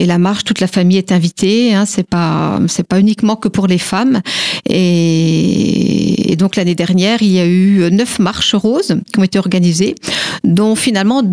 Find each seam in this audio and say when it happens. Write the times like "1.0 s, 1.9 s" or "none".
none

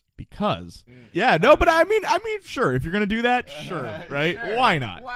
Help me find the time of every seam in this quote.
1.1 s

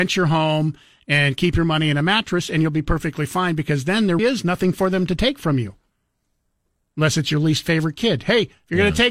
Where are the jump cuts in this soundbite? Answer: 4.2 s

